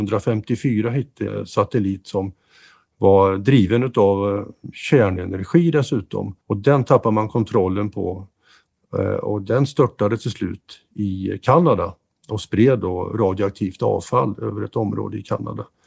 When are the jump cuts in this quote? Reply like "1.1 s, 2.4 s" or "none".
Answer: 1.3 s, 6.4 s